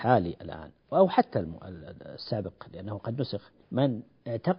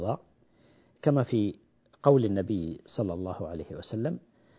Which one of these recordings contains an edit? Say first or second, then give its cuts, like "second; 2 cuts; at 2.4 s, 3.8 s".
first; 1 cut; at 3.6 s